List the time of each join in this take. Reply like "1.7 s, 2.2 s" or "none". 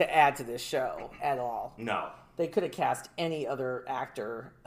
none